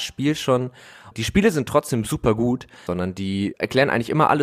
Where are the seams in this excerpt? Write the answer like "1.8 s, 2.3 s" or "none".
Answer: 1.1 s, 2.9 s